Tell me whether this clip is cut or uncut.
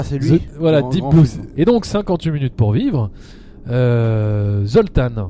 cut